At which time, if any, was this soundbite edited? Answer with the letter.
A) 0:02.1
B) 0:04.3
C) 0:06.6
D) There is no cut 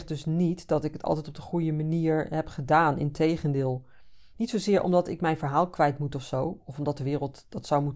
B